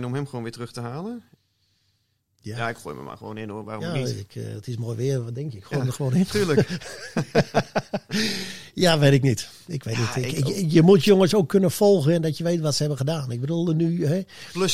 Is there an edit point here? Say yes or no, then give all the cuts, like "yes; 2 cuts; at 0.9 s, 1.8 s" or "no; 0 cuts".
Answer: no; 0 cuts